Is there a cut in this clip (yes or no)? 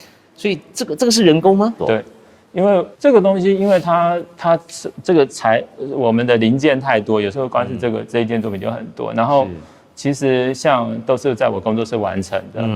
yes